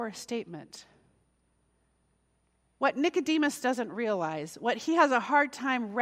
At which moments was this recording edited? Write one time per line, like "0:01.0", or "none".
none